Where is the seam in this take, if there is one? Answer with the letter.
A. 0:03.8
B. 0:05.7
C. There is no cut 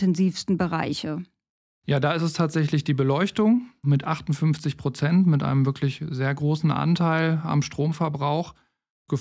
A